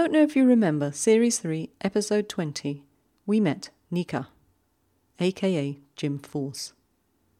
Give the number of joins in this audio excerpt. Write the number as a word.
zero